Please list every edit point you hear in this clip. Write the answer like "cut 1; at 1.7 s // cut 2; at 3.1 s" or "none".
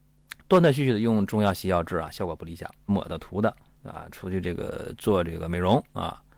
cut 1; at 2.9 s